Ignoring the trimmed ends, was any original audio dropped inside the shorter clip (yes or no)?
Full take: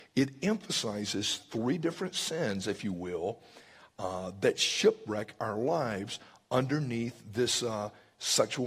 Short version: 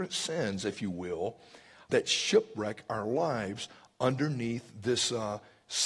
yes